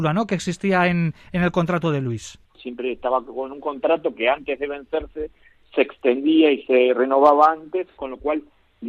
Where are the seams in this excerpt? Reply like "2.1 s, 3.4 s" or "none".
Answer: 2.5 s